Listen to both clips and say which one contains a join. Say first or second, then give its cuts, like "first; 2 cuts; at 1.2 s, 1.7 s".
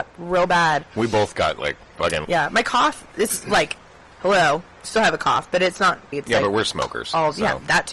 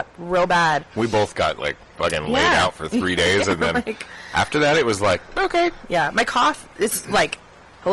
first; 2 cuts; at 2.2 s, 6.1 s